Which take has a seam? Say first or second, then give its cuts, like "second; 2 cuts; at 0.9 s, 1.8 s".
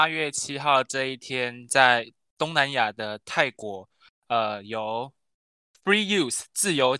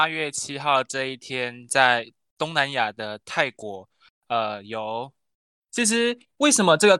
second; 1 cut; at 5.6 s